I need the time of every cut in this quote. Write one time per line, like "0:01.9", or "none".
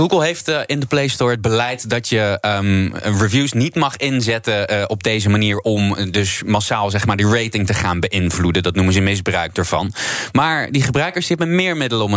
none